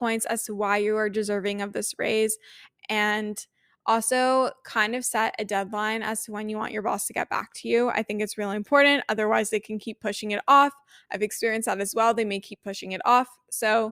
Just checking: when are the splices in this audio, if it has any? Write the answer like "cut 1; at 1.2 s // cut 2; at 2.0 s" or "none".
none